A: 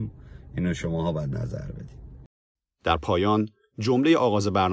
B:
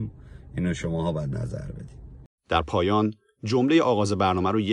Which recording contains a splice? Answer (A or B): B